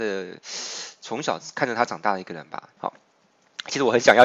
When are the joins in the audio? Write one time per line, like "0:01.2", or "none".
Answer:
0:02.8